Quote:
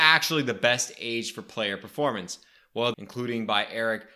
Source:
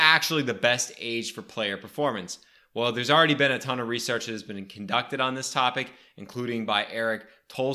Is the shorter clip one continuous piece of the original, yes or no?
no